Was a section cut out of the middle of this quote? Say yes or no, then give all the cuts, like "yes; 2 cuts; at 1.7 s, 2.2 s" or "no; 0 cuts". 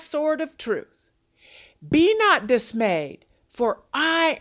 no; 0 cuts